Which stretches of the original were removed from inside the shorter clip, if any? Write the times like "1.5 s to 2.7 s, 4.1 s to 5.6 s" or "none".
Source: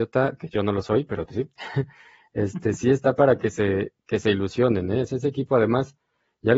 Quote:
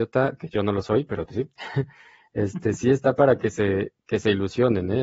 none